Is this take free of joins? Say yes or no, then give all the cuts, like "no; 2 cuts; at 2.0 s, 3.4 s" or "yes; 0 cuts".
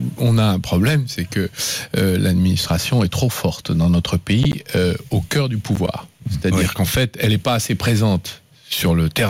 yes; 0 cuts